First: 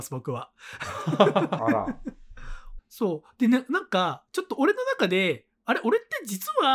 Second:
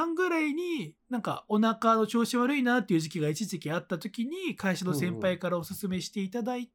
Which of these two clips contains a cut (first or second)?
first